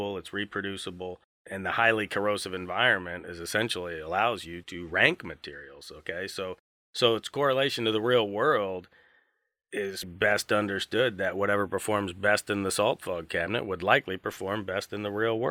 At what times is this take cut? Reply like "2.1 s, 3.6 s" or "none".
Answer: 4.6 s, 10.0 s